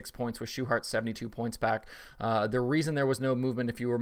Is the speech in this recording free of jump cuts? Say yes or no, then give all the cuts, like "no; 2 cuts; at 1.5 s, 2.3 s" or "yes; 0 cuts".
yes; 0 cuts